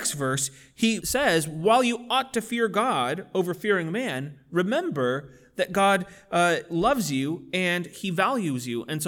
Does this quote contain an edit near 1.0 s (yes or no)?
yes